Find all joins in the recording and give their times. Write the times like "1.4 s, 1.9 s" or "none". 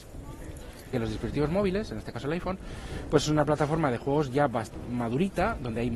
0.9 s